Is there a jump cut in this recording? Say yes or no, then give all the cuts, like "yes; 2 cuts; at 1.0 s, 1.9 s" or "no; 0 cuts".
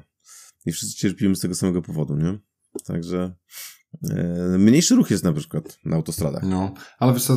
no; 0 cuts